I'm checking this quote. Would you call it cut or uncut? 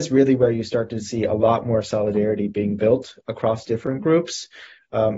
uncut